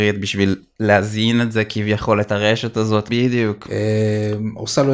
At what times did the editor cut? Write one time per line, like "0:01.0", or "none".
0:03.1